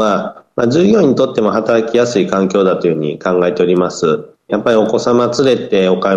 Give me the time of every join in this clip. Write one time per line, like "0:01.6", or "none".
0:04.5